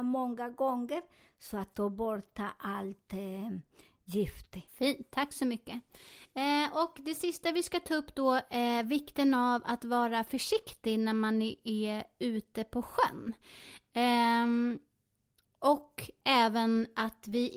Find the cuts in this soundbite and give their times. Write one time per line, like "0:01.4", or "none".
0:04.7